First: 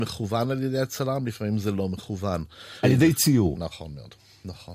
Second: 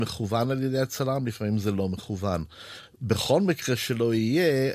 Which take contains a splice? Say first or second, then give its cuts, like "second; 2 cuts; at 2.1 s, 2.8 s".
first; 1 cut; at 2.8 s